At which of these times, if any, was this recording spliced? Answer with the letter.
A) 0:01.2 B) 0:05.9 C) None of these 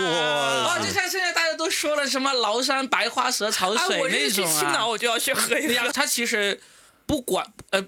B